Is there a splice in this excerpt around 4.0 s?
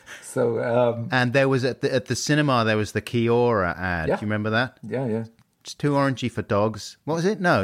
no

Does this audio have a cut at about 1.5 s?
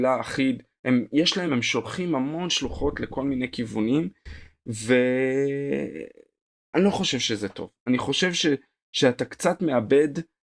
no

